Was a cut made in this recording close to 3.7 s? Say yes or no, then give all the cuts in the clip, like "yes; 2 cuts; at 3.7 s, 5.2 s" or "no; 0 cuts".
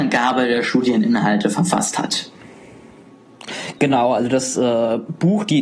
no; 0 cuts